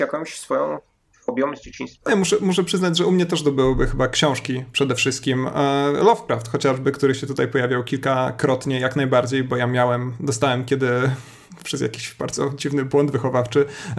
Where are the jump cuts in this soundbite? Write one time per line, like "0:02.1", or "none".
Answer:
none